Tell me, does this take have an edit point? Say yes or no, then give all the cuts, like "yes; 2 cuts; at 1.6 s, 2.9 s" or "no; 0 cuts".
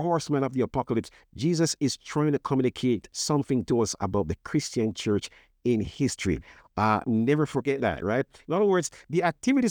no; 0 cuts